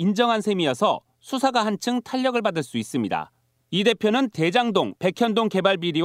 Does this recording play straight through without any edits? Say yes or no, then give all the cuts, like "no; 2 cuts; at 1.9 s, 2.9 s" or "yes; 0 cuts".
no; 2 cuts; at 3.6 s, 5.0 s